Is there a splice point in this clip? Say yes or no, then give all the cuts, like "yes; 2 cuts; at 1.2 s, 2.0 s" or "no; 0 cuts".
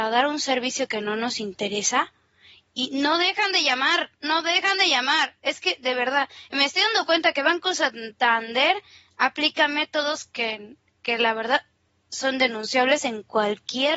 no; 0 cuts